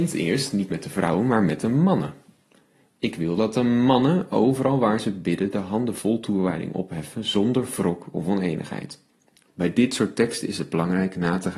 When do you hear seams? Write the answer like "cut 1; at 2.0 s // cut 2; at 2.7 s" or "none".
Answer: cut 1; at 9.5 s